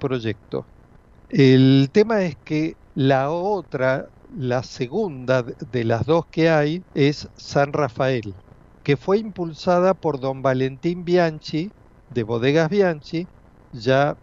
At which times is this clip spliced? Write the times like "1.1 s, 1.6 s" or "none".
1.2 s, 6.9 s